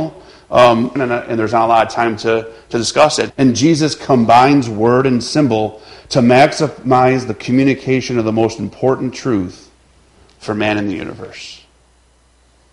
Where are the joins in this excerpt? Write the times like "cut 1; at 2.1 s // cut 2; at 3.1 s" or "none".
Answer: cut 1; at 1.0 s // cut 2; at 3.3 s